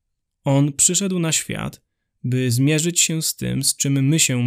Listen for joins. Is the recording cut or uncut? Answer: uncut